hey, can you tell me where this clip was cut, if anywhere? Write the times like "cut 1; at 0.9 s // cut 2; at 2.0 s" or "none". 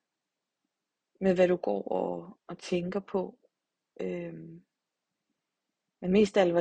none